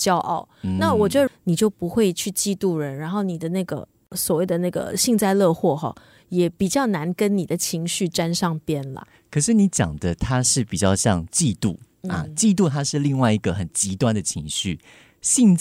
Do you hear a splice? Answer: yes; 1 cut; at 1.3 s

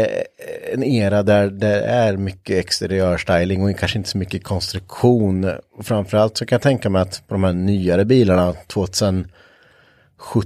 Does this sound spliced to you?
no; 0 cuts

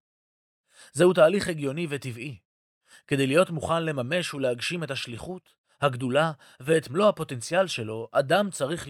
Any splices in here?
no; 0 cuts

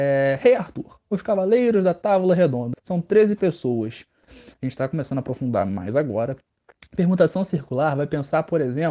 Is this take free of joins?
no; 2 cuts; at 2.7 s, 4.2 s

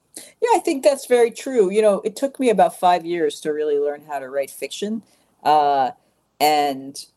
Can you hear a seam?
no; 0 cuts

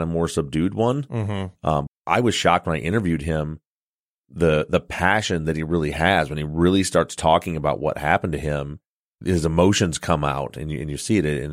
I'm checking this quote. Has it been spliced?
yes; 1 cut; at 1.9 s

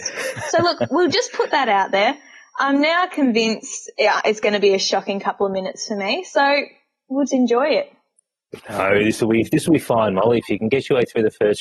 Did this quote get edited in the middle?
yes; 1 cut; at 7.3 s

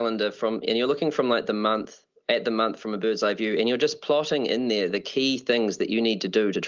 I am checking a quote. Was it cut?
no; 0 cuts

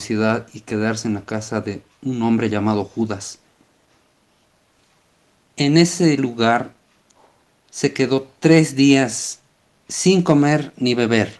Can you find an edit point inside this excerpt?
no; 0 cuts

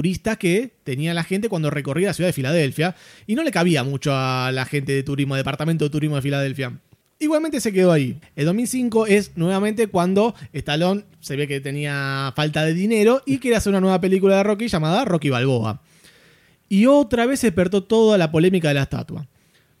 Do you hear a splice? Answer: yes; 1 cut; at 8.2 s

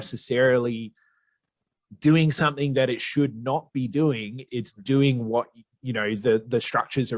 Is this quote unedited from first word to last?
no; 1 cut; at 4.5 s

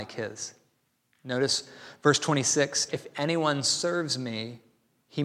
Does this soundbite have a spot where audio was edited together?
yes; 1 cut; at 2.9 s

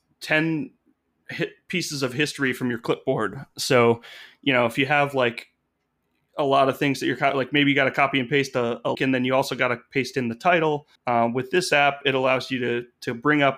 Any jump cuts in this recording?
yes; 2 cuts; at 8.9 s, 11.0 s

